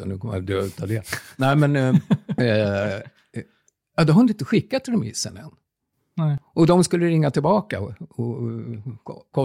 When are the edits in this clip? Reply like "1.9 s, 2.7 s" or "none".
2.4 s

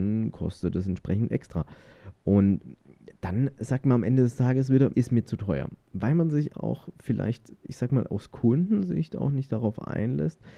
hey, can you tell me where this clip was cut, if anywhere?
4.9 s, 6.5 s

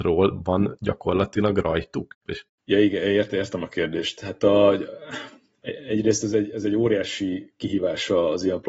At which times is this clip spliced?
2.3 s

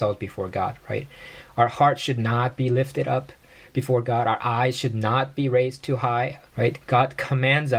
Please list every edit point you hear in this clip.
6.5 s

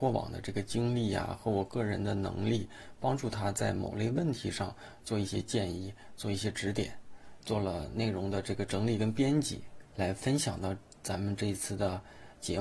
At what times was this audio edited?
7.4 s, 9.9 s

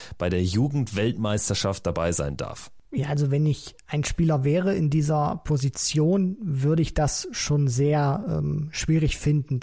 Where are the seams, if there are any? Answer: none

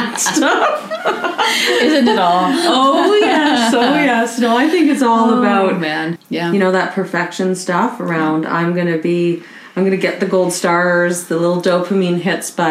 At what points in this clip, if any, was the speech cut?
6.2 s

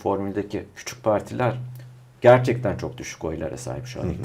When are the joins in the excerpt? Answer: none

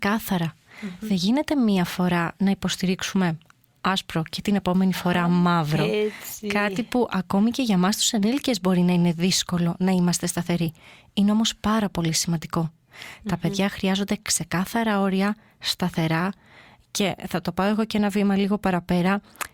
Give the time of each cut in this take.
none

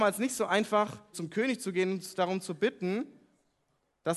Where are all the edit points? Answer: 1.1 s

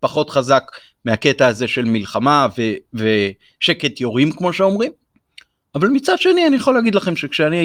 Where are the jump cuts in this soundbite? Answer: none

